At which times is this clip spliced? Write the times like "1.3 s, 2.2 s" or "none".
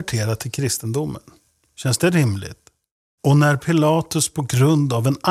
3.2 s

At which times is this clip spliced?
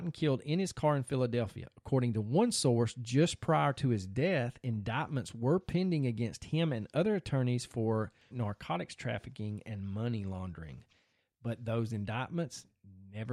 8.3 s

